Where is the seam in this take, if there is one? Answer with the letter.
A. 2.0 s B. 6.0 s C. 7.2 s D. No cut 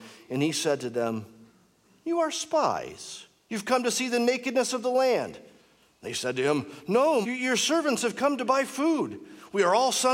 C